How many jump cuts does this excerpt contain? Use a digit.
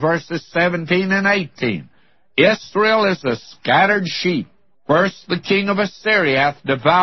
1